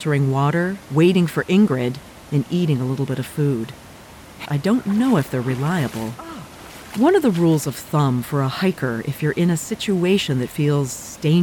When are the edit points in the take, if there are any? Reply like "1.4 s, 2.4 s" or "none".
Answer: 4.4 s, 6.9 s